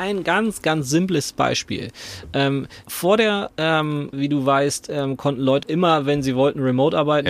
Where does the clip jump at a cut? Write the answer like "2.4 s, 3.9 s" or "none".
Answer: 2.8 s, 4.1 s, 5.6 s